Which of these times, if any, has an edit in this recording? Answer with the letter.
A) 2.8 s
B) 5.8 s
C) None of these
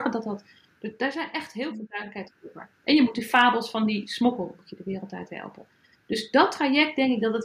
C